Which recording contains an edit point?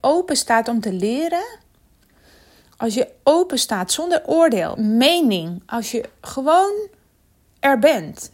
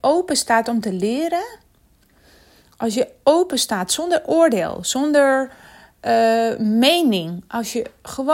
first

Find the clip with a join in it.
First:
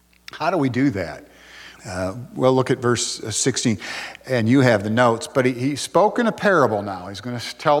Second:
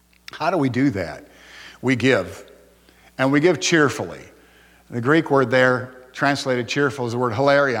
first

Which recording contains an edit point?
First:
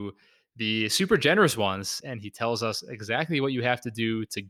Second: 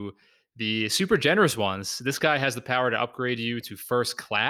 first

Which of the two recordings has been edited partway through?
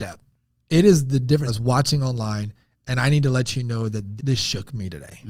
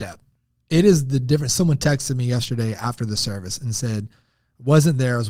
first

